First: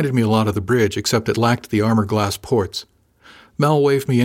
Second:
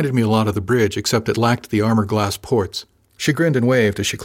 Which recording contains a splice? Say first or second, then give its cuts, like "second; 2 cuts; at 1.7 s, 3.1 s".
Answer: second; 1 cut; at 3.0 s